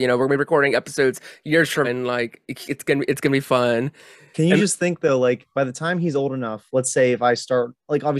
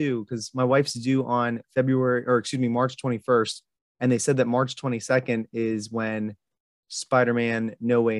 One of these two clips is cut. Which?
first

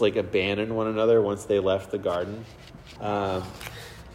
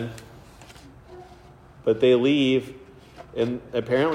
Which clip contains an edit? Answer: first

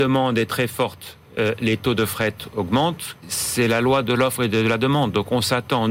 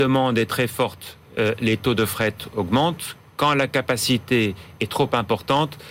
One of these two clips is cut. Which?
first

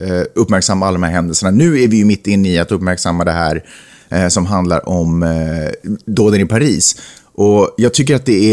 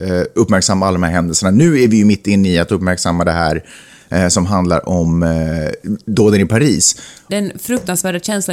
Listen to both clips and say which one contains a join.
second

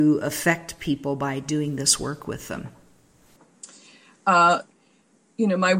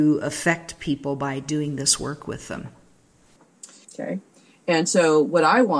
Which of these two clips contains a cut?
second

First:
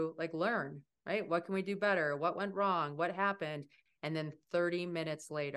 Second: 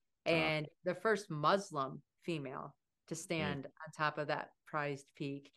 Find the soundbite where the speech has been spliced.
first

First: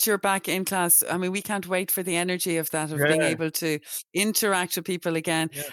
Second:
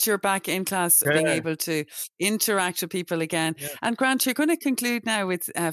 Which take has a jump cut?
second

